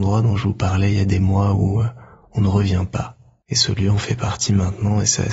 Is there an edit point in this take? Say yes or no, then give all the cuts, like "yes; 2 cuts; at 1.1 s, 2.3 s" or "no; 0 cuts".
no; 0 cuts